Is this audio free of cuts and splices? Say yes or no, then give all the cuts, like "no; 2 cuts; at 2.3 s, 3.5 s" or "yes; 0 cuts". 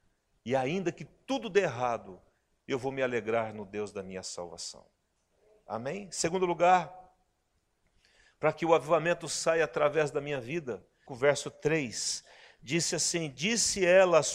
no; 1 cut; at 11.1 s